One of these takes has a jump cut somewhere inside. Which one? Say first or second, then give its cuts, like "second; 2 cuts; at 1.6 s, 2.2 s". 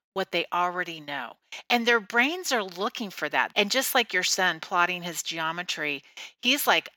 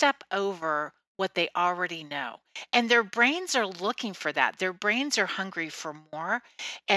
first; 1 cut; at 3.5 s